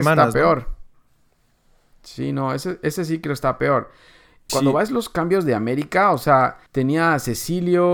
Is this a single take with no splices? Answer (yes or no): no